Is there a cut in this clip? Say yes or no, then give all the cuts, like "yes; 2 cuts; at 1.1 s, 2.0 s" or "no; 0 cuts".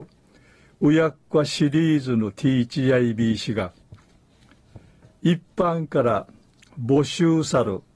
no; 0 cuts